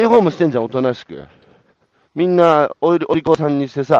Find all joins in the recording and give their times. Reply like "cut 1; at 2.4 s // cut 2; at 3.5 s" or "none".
cut 1; at 2.1 s

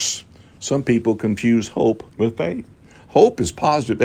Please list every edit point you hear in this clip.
cut 1; at 2.1 s

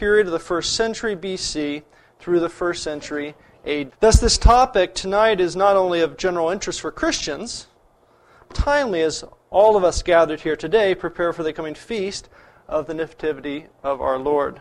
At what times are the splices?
cut 1; at 3.9 s // cut 2; at 8.5 s

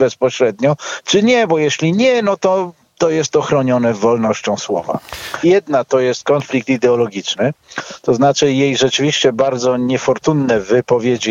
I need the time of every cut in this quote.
cut 1; at 5.4 s

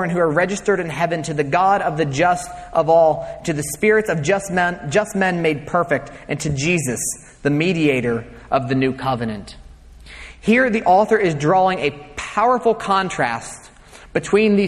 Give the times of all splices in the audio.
none

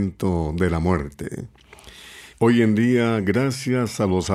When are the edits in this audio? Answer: cut 1; at 2.3 s

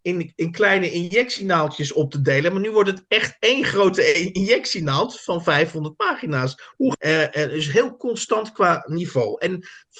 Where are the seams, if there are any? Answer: cut 1; at 6.9 s

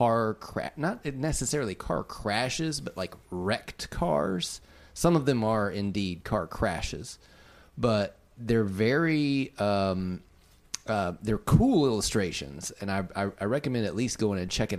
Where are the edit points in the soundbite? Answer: none

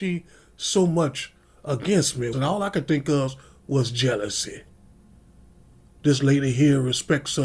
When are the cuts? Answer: cut 1; at 2.3 s

